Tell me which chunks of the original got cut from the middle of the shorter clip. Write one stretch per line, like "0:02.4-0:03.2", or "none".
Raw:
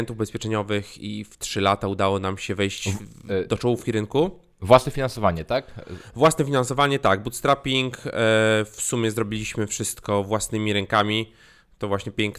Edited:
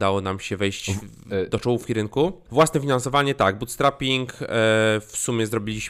0:04.4-0:06.1